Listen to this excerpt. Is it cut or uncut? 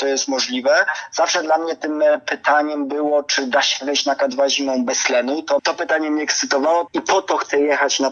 cut